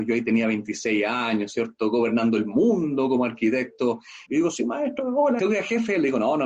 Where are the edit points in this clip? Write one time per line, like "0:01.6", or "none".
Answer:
0:04.3
0:05.4